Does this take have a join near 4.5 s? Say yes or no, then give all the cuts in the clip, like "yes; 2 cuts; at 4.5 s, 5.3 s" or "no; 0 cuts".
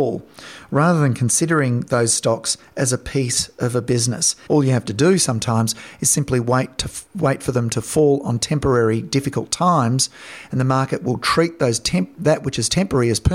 yes; 1 cut; at 4.5 s